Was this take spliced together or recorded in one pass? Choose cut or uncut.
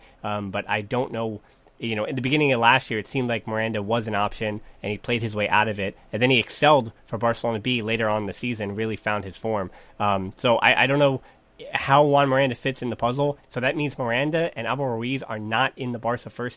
cut